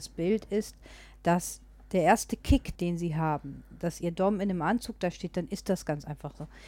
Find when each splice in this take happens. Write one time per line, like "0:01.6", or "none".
0:02.7